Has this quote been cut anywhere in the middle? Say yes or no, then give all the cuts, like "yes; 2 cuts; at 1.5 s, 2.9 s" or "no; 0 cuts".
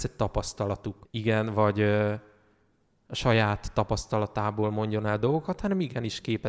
yes; 1 cut; at 1.1 s